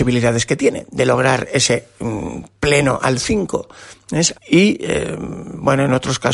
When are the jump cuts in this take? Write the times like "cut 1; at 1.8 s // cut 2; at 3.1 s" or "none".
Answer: cut 1; at 4.3 s